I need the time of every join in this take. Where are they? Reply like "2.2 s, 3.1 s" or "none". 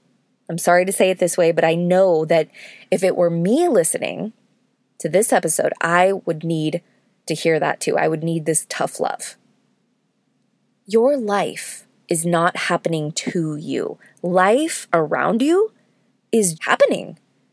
16.5 s

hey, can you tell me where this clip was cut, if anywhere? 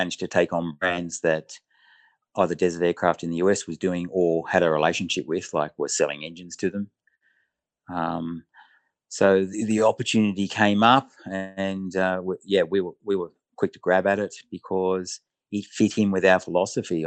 none

